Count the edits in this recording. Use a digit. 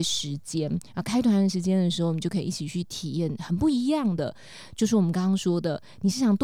0